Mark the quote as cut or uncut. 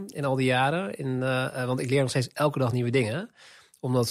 uncut